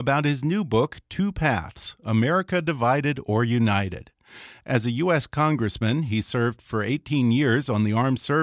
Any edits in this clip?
no; 0 cuts

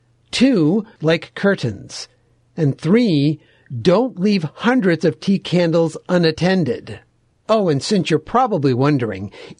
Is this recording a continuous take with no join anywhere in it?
no; 1 cut; at 1.0 s

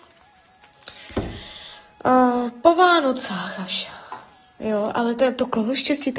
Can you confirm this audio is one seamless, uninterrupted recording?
yes; 0 cuts

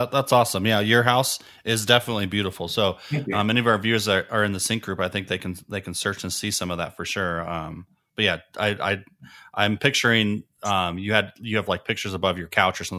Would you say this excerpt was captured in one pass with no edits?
yes; 0 cuts

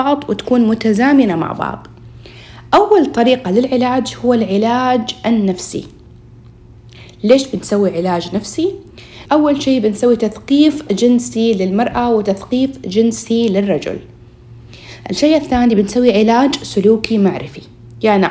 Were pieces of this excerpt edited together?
yes; 1 cut; at 9.3 s

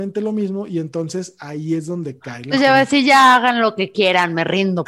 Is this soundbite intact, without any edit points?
yes; 0 cuts

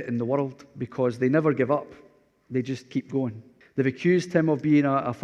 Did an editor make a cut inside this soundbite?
yes; 1 cut; at 3.6 s

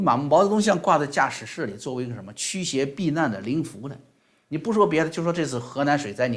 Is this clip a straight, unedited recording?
yes; 0 cuts

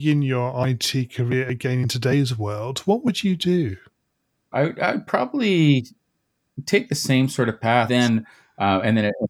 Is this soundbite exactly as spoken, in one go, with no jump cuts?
no; 2 cuts; at 4.5 s, 7.9 s

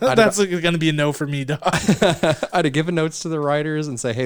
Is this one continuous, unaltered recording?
yes; 0 cuts

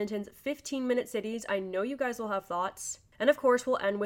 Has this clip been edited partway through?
no; 0 cuts

